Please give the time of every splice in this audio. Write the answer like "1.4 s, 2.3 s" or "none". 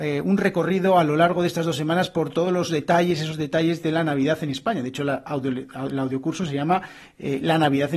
none